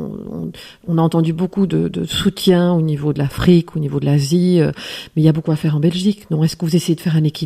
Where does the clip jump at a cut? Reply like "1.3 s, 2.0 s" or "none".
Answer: none